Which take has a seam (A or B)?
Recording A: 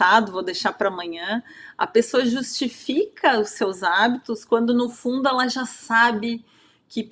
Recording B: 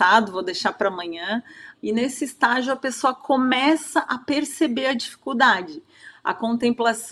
B